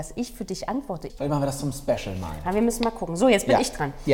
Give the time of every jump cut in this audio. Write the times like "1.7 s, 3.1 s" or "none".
1.1 s